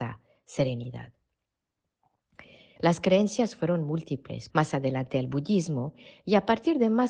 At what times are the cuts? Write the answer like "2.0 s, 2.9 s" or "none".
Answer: 2.8 s, 4.5 s

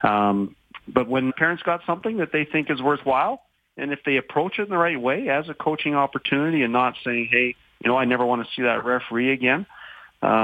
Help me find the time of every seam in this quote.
1.3 s

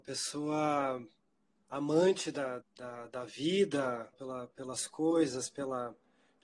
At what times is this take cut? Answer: 2.6 s, 4.1 s

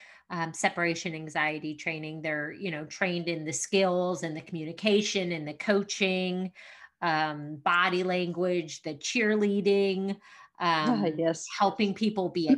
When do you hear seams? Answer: none

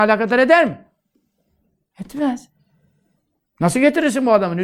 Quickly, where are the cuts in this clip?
3.5 s

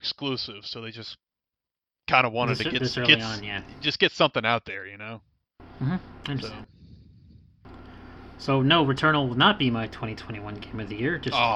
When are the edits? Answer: none

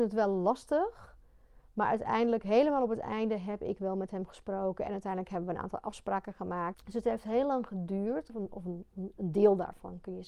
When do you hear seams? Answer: 6.7 s, 8.3 s

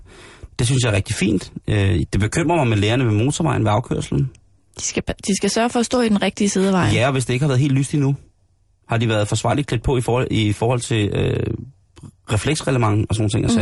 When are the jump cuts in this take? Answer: none

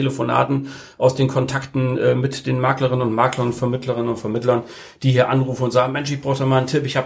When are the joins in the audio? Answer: none

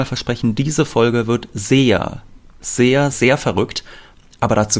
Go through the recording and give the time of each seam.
3.1 s

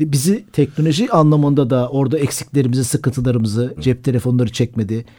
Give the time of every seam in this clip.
3.8 s

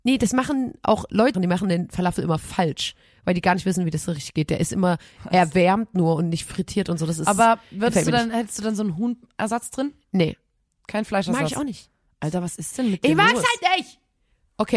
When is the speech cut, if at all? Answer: 1.3 s

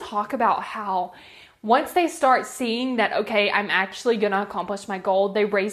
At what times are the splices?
none

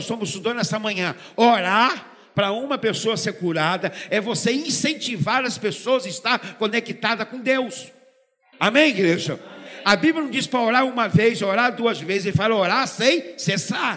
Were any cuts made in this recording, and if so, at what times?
8.5 s

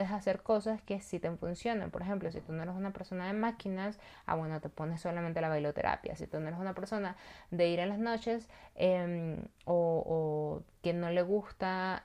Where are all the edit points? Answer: 6.2 s

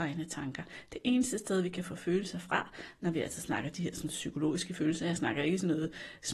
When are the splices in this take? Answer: none

